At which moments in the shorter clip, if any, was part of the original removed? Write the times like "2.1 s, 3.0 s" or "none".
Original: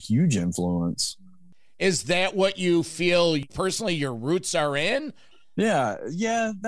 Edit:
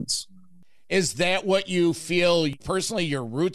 none